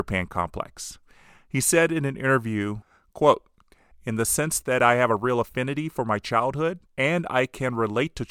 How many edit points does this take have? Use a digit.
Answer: 2